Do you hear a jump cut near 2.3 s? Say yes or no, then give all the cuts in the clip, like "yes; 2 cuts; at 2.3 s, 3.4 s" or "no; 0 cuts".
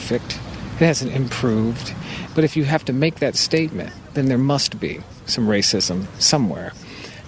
yes; 1 cut; at 2.3 s